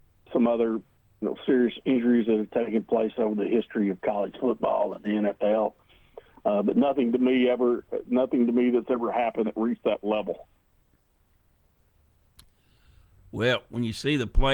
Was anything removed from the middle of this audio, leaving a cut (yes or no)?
no